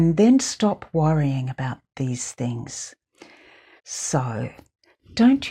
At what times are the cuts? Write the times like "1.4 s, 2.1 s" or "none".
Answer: 3.8 s